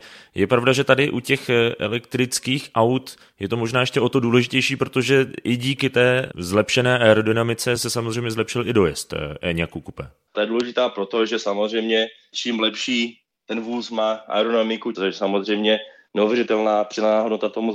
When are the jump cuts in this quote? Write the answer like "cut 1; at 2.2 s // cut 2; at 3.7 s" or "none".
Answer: cut 1; at 10.3 s // cut 2; at 14.9 s